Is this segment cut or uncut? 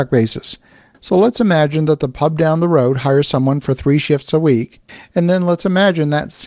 cut